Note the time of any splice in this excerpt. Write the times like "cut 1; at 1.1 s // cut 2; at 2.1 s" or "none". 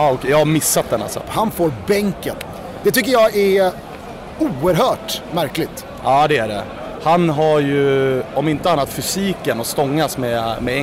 cut 1; at 1.2 s

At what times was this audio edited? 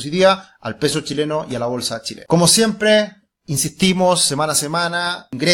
none

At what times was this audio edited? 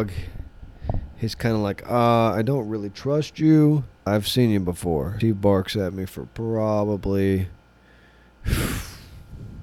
cut 1; at 4.1 s // cut 2; at 5.2 s

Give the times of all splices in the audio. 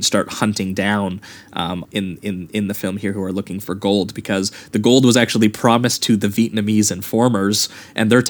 cut 1; at 1.8 s

